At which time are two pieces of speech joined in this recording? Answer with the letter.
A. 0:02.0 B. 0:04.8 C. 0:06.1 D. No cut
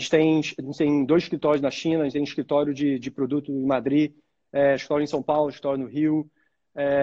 D